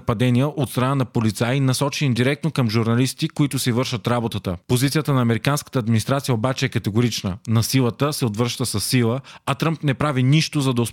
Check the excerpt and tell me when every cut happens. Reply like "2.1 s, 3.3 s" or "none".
none